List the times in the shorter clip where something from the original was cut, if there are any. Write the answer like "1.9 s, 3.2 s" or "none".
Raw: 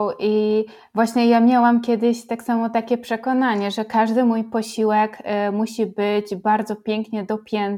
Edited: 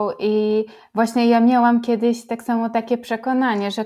none